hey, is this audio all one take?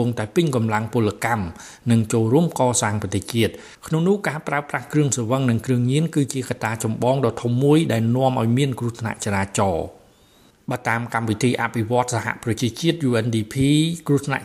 yes; 0 cuts

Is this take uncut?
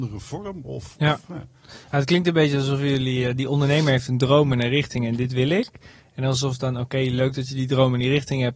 yes; 0 cuts

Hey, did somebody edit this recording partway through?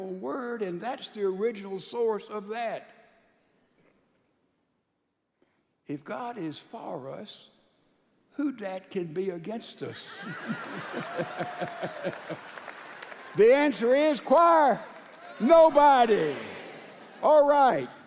no; 0 cuts

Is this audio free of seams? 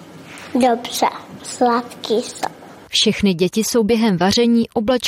yes; 0 cuts

